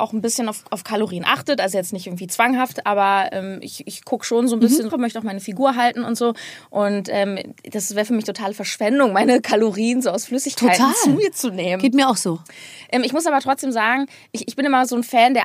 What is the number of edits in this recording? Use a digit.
1